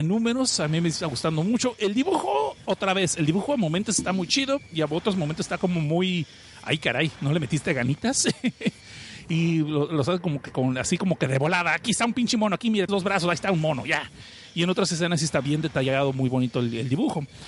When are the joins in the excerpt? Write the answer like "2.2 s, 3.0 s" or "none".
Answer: 12.9 s